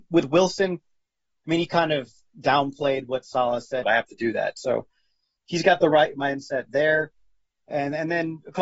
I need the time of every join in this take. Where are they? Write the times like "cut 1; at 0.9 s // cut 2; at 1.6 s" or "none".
cut 1; at 3.8 s